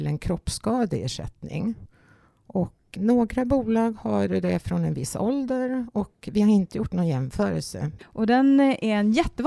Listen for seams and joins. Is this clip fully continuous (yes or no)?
no